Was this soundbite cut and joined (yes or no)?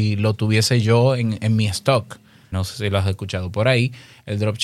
yes